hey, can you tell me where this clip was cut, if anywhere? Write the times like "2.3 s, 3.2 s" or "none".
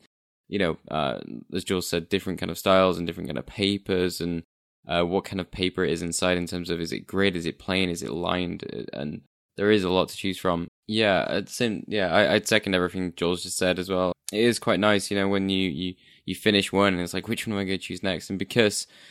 10.7 s, 14.1 s